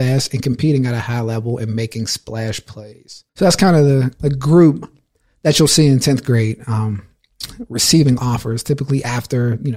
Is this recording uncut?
no; 1 cut; at 3.3 s

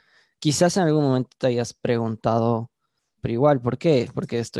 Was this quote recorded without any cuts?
no; 1 cut; at 3.2 s

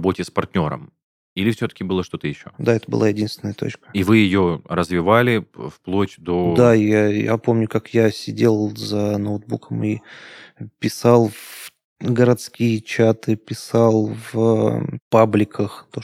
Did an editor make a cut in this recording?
no; 0 cuts

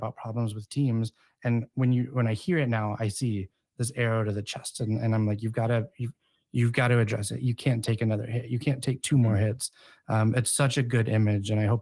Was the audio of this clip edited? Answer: no; 0 cuts

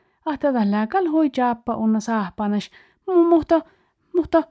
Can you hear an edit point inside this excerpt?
no; 0 cuts

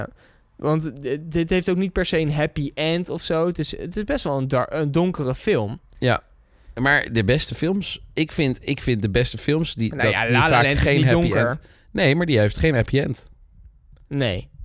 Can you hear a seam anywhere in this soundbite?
no; 0 cuts

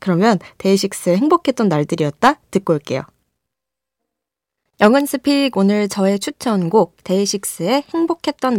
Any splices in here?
no; 0 cuts

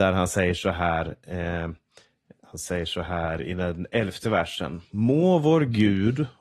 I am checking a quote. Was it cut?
no; 0 cuts

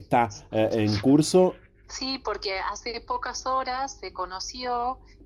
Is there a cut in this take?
yes; 1 cut; at 1.8 s

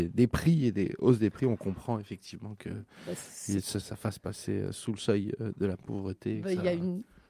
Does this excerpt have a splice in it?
yes; 1 cut; at 3.8 s

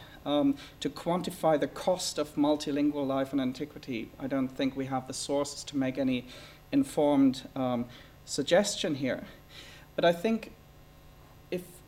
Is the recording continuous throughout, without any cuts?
yes; 0 cuts

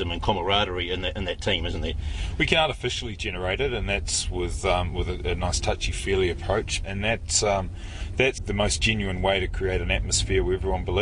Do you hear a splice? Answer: yes; 2 cuts; at 6.8 s, 8.4 s

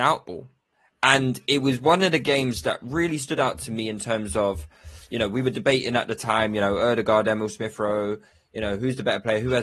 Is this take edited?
no; 0 cuts

